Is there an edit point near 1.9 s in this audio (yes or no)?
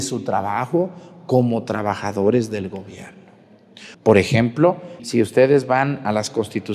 no